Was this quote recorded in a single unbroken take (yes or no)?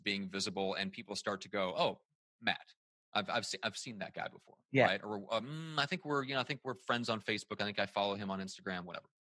yes